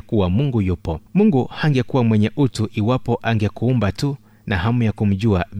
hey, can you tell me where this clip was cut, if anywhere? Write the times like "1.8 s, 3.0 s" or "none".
1.1 s